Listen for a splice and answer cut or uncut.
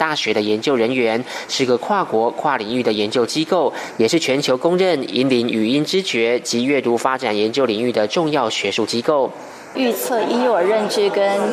cut